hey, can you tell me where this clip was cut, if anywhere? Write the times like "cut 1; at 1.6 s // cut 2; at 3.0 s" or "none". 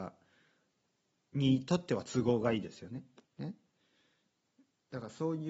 cut 1; at 3.3 s